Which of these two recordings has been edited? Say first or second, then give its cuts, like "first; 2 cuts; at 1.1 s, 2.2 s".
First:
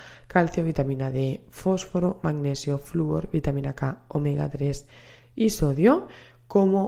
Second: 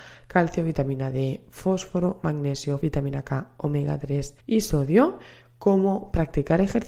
second; 2 cuts; at 2.8 s, 4.4 s